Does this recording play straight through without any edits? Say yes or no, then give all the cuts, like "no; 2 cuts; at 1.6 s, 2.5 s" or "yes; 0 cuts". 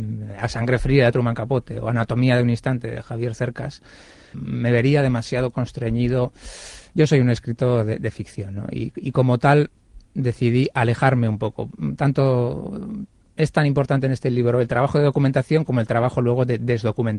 no; 1 cut; at 4.3 s